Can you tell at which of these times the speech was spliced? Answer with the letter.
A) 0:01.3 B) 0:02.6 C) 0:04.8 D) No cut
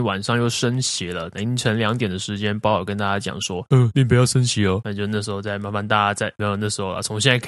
C